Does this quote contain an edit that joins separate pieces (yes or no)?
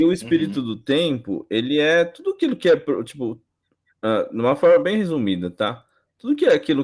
no